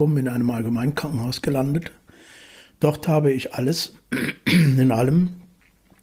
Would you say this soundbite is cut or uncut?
uncut